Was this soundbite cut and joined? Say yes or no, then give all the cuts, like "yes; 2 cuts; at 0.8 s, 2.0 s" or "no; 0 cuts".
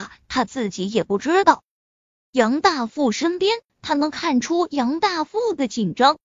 yes; 2 cuts; at 2.2 s, 3.7 s